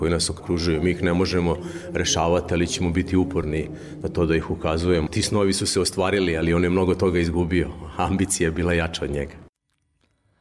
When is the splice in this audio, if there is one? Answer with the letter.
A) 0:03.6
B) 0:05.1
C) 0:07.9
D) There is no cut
B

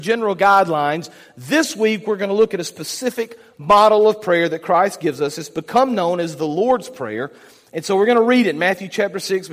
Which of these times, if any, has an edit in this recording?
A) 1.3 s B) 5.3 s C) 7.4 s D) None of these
D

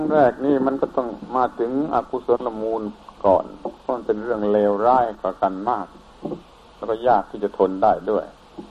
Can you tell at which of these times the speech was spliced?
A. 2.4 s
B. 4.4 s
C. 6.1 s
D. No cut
A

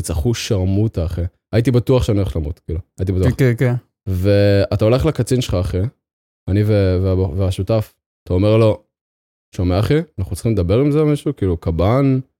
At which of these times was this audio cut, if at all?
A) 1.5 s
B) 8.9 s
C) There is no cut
C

